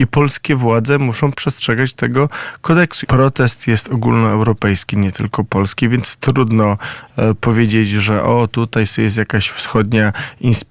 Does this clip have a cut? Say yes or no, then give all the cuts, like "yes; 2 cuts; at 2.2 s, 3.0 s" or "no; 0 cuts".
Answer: yes; 1 cut; at 3.0 s